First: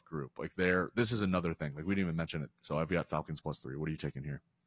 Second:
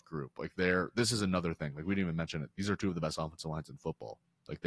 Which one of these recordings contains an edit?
first; 1 cut; at 2.5 s

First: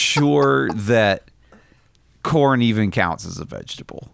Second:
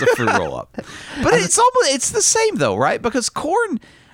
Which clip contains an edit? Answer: second; 1 cut; at 1.5 s

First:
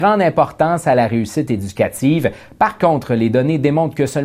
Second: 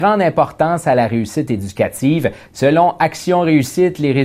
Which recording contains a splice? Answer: second; 1 cut; at 2.4 s

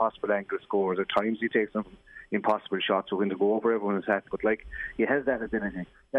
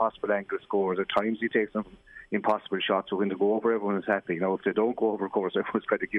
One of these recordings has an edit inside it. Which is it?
first; 1 cut; at 4.3 s

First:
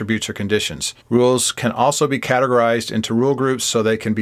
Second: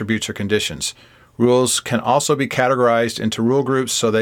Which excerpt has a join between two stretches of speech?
first; 1 cut; at 1.0 s

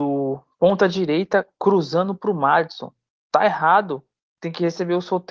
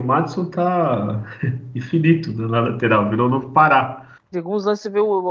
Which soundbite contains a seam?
second; 1 cut; at 4.3 s

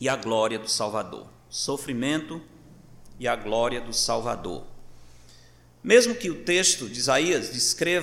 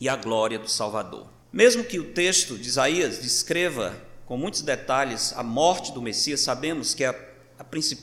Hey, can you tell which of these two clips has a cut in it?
second; 1 cut; at 1.4 s

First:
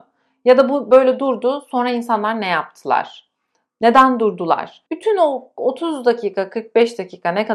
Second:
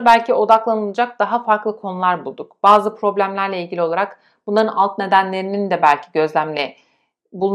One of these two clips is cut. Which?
first; 1 cut; at 4.9 s

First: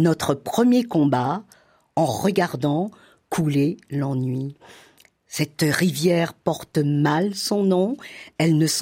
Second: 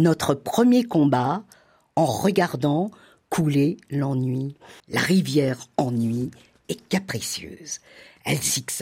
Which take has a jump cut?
second; 1 cut; at 4.8 s

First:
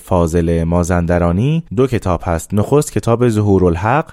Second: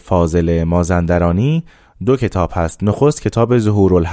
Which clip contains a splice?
first; 1 cut; at 1.7 s

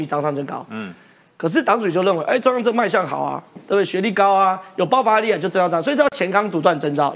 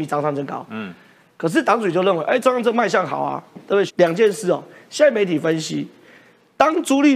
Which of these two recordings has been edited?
second; 1 cut; at 3.9 s

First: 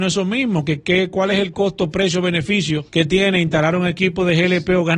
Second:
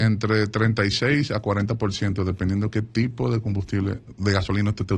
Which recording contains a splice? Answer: first; 1 cut; at 2.9 s

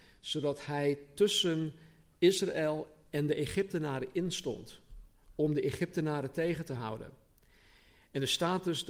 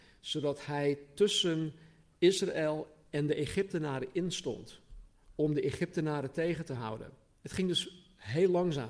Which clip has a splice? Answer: second; 1 cut; at 7.4 s

